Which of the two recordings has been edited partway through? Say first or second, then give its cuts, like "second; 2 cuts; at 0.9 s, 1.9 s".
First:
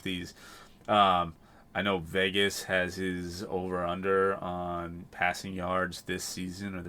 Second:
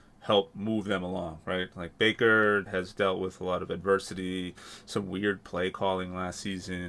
second; 1 cut; at 2.7 s